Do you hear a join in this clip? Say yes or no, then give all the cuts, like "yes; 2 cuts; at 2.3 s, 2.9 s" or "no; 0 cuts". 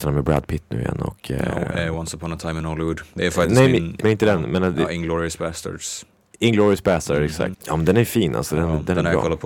yes; 2 cuts; at 4.0 s, 7.5 s